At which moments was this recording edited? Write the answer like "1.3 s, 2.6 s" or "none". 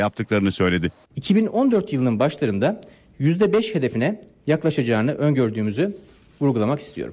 1.0 s

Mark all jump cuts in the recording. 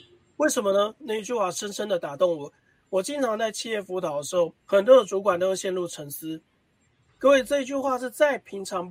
1.0 s, 4.6 s, 7.1 s

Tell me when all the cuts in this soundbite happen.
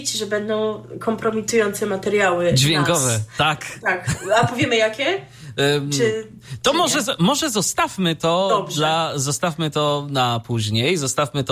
none

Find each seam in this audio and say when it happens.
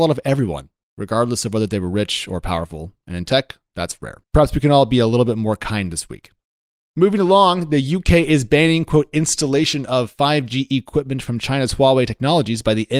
4.2 s

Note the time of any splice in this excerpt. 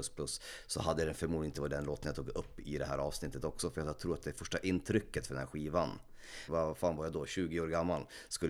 6.5 s

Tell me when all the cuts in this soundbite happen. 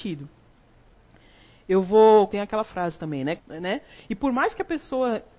2.3 s, 3.4 s

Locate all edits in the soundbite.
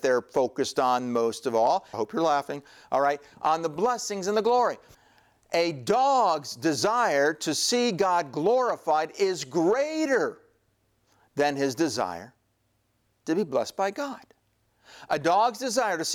1.9 s

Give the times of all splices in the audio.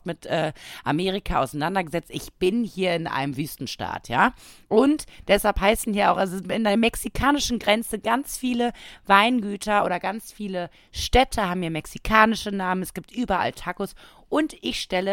none

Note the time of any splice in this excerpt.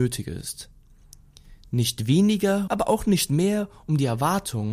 2.7 s

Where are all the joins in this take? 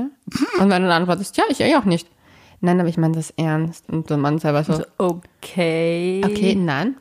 3.9 s

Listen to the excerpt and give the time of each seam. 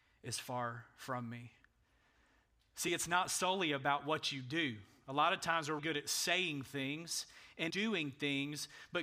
5.8 s, 7.7 s

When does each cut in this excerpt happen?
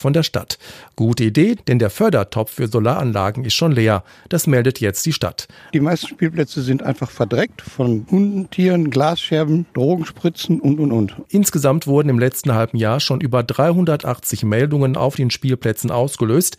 1.6 s, 5.7 s, 11.2 s

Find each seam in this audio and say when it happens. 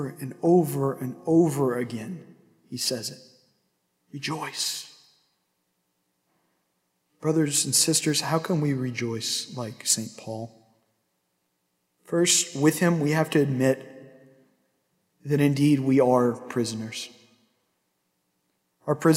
none

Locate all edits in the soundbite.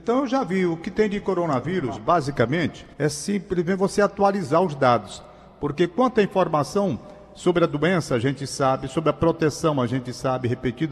2.9 s

